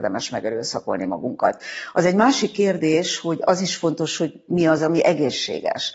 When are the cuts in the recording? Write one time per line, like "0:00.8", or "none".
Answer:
none